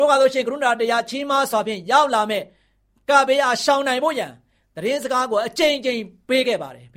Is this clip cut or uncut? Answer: uncut